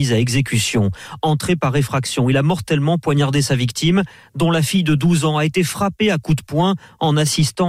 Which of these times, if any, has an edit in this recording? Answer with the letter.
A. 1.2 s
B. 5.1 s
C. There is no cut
C